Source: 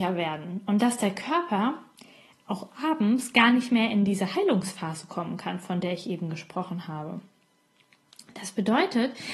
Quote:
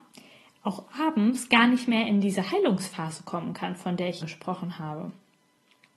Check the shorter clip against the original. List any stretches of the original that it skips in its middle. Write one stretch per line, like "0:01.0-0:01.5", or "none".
0:06.0-0:06.3